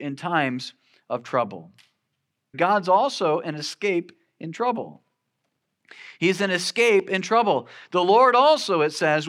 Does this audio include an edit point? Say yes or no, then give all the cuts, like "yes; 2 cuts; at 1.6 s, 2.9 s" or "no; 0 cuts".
yes; 1 cut; at 2.5 s